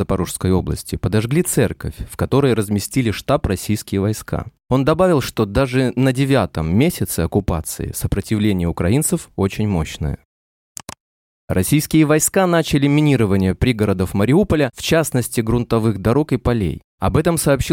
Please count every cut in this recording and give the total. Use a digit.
0